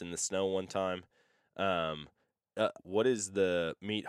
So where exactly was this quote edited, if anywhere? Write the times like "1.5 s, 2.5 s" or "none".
2.8 s

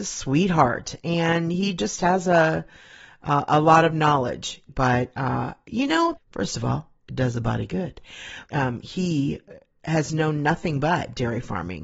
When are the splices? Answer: 4.7 s, 6.2 s, 8.5 s

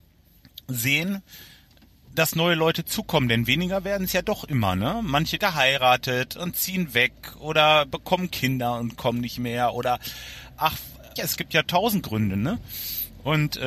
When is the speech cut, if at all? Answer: 5.4 s, 11.2 s

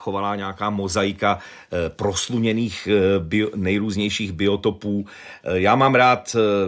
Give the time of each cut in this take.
none

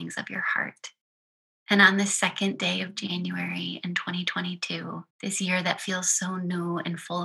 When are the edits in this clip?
1.6 s, 5.1 s

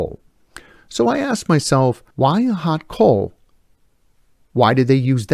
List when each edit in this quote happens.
2.1 s

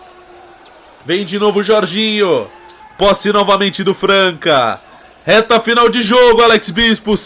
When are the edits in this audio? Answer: 2.8 s

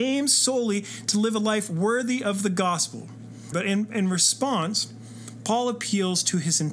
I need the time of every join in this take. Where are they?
3.5 s

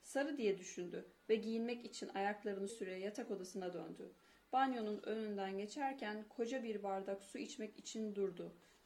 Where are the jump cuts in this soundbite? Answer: 2.7 s

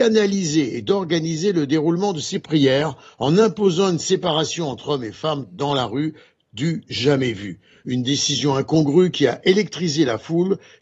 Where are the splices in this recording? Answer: none

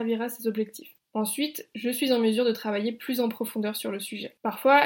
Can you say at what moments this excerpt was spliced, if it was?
none

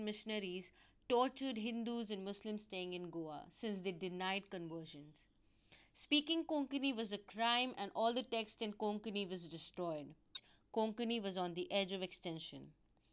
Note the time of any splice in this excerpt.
none

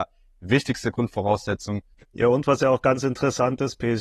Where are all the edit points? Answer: 1.9 s

